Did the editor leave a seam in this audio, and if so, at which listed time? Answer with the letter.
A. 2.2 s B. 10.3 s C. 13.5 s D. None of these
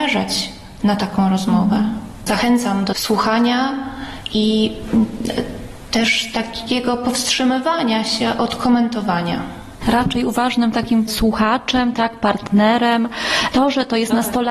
C